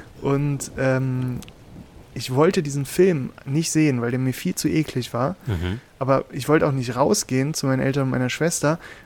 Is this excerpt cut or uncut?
uncut